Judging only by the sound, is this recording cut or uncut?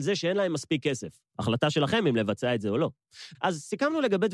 cut